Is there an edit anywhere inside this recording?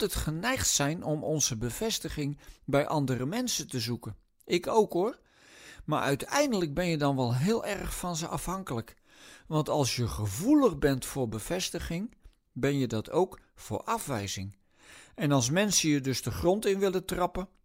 no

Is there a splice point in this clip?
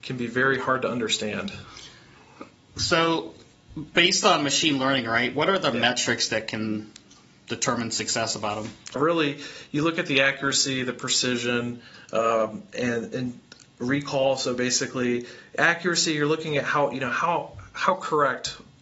yes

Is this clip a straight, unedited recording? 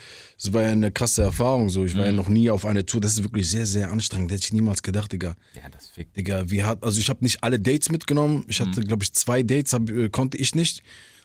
yes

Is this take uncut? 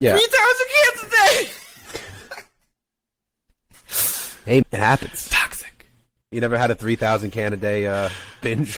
no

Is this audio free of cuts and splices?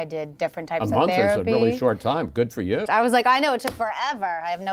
no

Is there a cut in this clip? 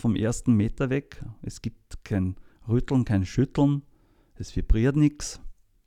no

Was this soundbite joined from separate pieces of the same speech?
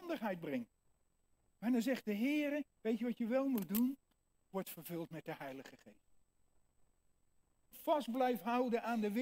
yes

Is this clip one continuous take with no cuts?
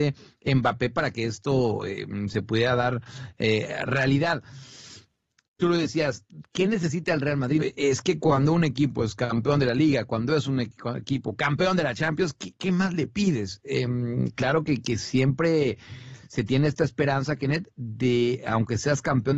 no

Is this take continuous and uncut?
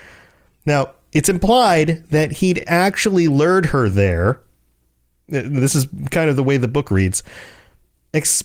yes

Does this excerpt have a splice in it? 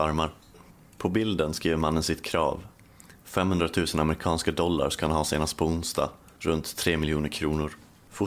no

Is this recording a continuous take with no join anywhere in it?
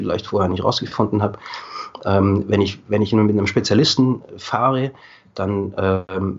yes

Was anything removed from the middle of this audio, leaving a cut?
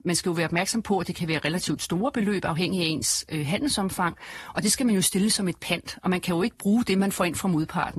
no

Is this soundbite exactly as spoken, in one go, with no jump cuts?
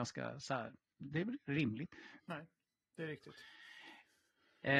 no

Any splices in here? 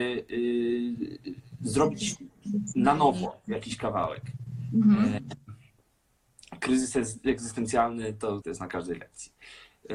yes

